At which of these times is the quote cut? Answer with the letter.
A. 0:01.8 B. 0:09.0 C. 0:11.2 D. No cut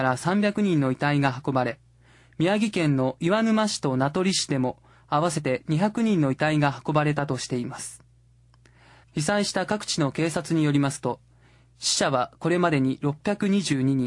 B